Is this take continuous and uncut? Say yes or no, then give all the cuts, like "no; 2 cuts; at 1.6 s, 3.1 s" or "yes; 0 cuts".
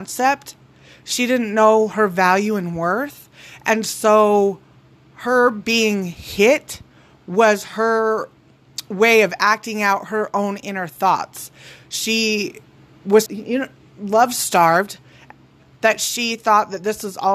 no; 1 cut; at 13.3 s